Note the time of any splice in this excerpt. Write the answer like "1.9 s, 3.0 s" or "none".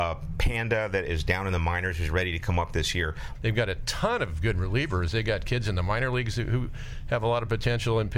3.3 s